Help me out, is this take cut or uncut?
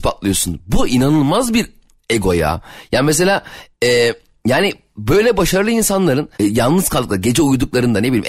cut